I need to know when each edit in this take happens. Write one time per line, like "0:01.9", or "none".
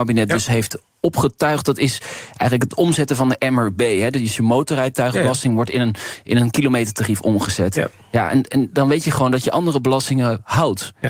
none